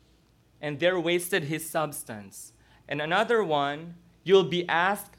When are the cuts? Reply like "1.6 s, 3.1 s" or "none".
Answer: 2.8 s